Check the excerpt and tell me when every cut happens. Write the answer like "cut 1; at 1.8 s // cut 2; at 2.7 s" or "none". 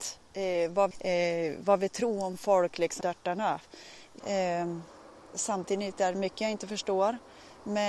cut 1; at 0.9 s // cut 2; at 3.0 s // cut 3; at 4.2 s